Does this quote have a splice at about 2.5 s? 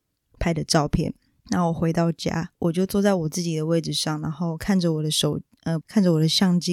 yes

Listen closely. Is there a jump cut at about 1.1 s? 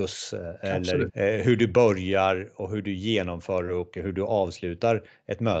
yes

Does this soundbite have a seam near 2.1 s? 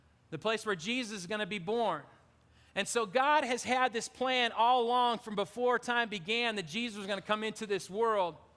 no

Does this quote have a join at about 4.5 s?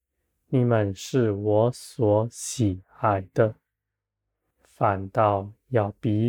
yes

